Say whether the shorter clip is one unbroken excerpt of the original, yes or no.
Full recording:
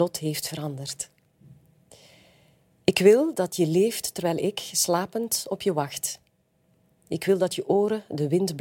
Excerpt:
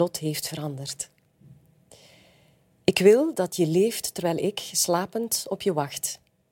yes